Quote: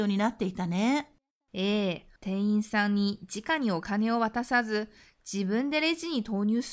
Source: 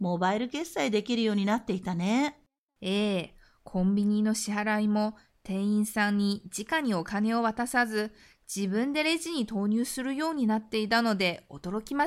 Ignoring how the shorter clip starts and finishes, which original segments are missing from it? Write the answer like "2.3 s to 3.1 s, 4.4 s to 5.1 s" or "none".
3.4 s to 5.4 s